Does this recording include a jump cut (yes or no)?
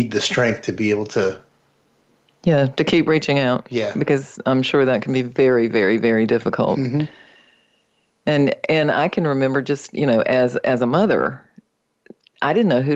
no